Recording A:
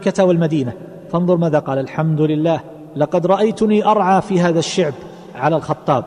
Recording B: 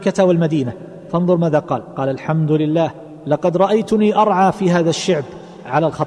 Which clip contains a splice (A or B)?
A